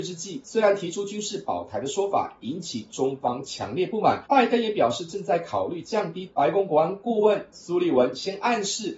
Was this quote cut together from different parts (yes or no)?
yes